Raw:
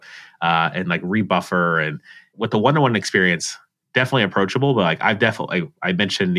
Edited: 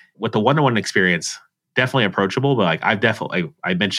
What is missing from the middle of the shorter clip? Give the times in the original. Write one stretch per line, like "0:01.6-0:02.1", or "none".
none